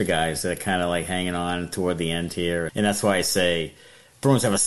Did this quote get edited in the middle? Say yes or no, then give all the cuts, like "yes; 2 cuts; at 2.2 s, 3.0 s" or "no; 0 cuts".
yes; 1 cut; at 2.7 s